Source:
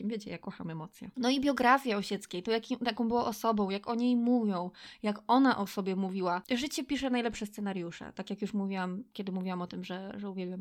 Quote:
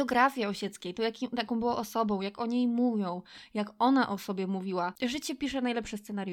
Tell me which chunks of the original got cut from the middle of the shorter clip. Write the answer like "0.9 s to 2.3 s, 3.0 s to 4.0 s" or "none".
none